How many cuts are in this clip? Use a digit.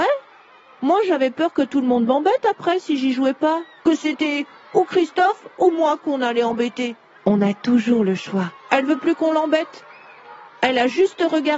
3